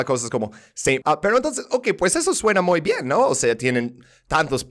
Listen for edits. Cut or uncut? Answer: cut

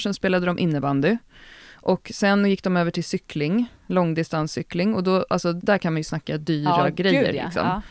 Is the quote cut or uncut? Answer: cut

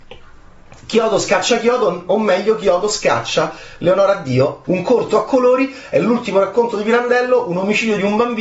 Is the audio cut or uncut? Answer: cut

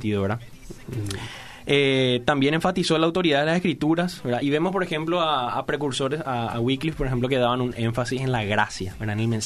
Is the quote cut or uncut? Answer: uncut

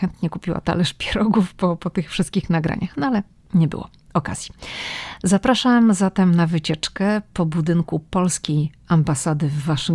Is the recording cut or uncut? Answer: uncut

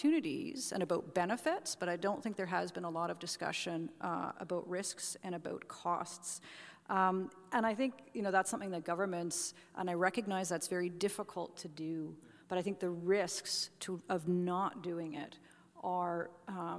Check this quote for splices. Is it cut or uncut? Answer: cut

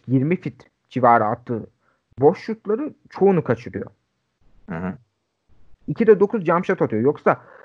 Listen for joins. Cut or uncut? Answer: cut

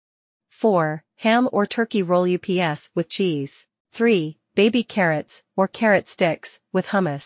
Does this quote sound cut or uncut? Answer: cut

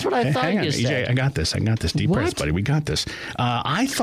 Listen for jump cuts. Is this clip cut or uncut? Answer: uncut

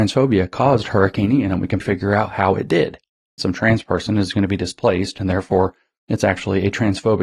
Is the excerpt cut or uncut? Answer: cut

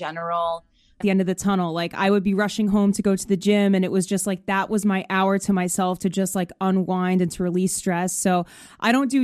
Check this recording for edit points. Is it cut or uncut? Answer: cut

